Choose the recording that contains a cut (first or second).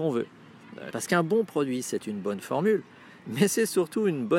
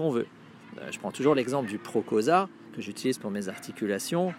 first